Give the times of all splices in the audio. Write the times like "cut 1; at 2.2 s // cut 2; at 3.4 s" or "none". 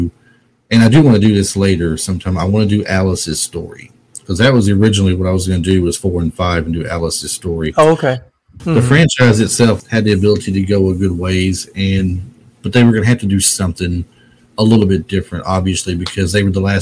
cut 1; at 8.6 s // cut 2; at 9.8 s